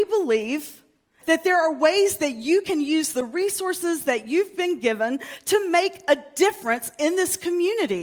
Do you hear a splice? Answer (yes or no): yes